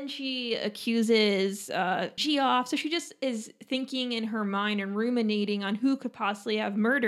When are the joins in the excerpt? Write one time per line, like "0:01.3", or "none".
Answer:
0:02.2